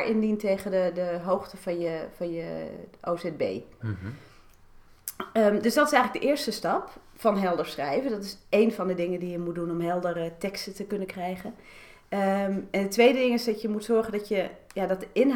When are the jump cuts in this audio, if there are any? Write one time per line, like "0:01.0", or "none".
0:03.8